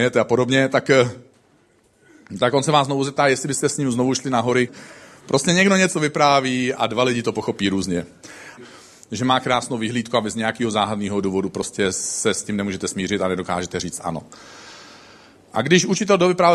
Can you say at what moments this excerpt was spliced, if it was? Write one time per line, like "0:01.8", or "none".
0:04.7
0:08.6